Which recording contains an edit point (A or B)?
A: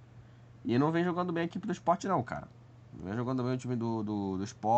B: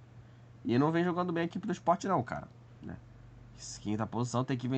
B